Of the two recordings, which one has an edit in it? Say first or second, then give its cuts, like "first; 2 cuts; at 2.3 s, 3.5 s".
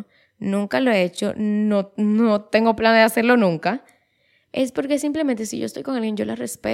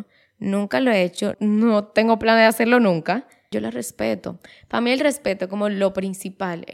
second; 2 cuts; at 1.3 s, 3.5 s